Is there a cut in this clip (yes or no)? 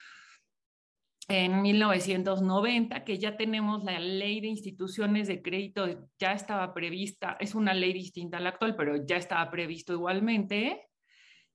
no